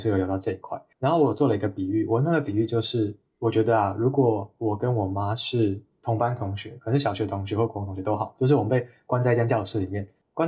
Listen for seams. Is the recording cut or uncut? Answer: uncut